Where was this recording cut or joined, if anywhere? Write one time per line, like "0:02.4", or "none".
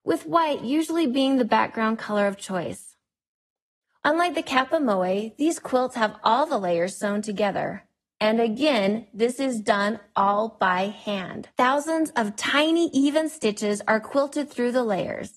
0:04.0
0:11.5